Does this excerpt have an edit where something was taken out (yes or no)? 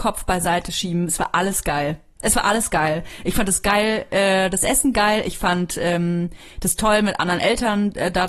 yes